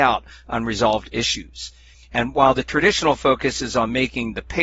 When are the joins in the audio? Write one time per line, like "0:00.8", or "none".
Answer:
0:01.9